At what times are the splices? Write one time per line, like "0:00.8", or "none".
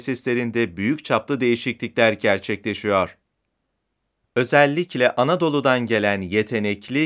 none